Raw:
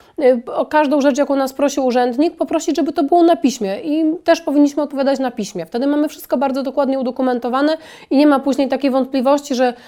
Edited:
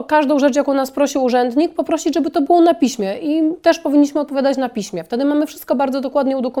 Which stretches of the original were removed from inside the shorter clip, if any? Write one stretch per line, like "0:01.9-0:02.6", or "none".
none